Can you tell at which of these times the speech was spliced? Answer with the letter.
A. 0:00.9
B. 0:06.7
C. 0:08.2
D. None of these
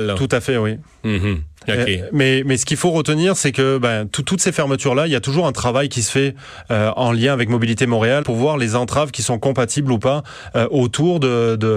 C